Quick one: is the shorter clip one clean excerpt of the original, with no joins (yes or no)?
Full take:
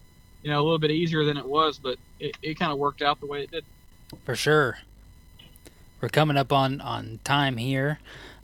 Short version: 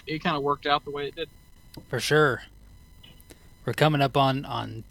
yes